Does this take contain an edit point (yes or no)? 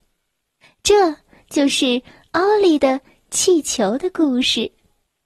no